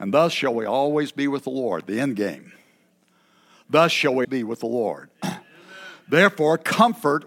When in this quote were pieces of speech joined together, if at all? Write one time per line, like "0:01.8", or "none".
0:04.2